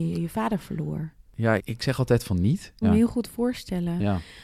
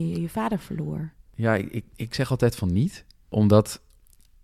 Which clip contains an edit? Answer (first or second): first